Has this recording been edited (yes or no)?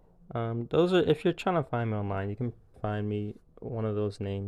yes